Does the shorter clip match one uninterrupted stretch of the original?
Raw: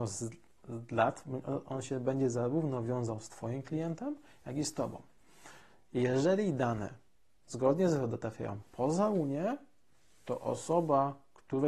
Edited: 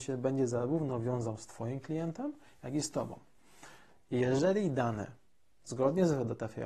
yes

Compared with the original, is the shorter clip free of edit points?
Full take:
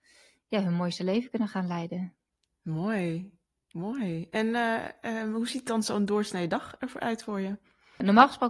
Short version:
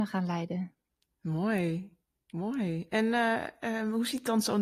yes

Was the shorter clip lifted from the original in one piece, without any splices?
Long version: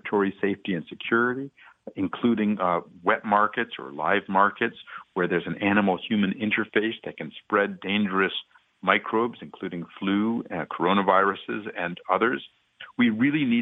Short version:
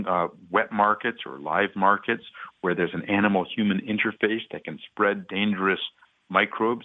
yes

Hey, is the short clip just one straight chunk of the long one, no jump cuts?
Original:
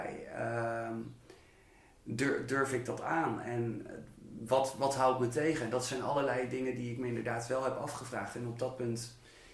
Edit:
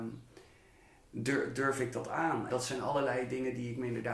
no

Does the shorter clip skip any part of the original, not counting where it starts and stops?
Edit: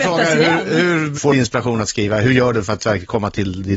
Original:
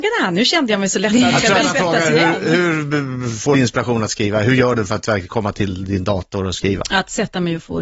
yes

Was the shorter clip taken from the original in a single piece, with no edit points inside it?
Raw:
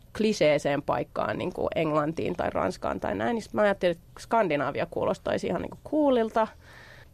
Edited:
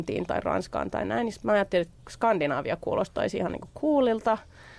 yes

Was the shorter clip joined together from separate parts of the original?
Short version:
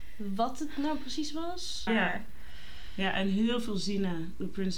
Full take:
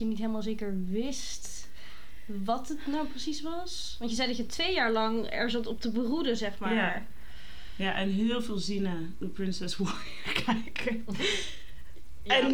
yes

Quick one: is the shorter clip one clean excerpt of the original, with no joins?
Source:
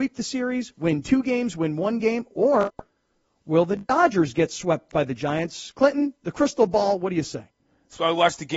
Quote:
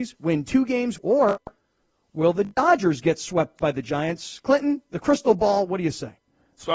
no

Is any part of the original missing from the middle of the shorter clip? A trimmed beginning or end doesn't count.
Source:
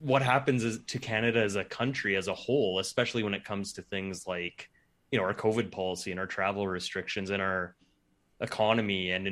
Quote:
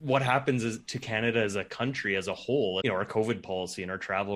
yes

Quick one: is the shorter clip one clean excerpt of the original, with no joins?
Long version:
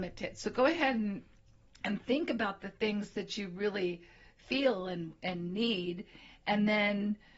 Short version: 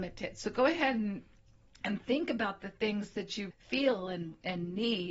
no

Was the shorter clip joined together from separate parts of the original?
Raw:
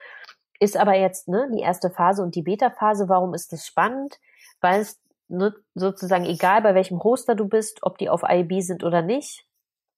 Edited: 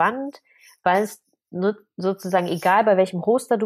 no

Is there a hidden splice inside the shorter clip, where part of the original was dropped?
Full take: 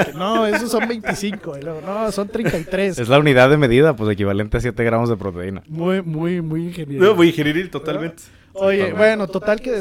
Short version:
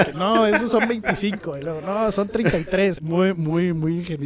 yes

